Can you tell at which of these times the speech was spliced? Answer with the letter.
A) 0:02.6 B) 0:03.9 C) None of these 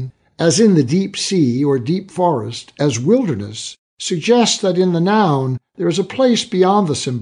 C